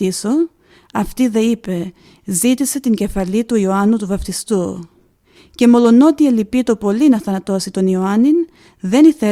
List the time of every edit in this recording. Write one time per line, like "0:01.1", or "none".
0:05.4